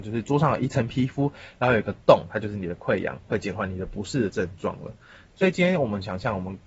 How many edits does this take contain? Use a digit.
2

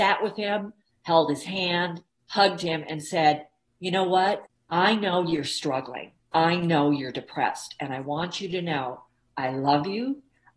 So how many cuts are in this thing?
0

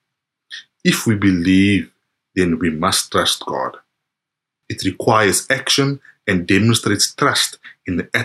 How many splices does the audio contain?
1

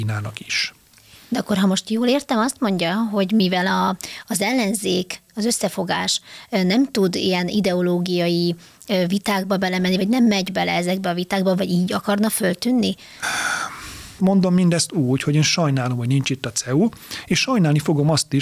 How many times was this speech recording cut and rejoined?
2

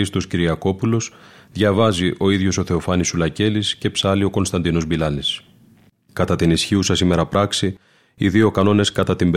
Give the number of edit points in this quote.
1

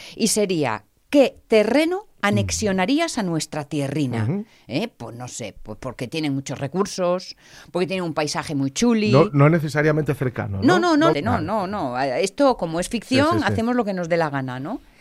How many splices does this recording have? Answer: 1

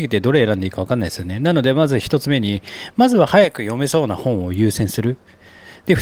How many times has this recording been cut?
0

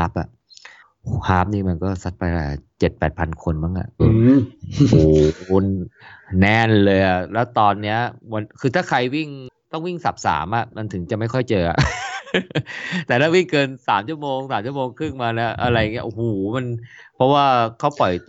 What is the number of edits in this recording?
2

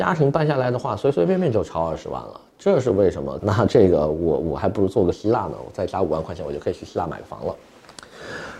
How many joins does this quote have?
1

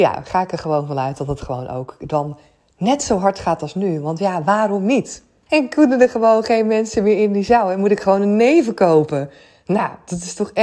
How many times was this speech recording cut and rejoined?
1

